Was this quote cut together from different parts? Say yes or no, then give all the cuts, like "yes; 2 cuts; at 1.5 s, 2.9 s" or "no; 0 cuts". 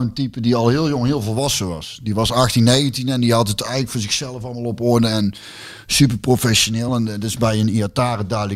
no; 0 cuts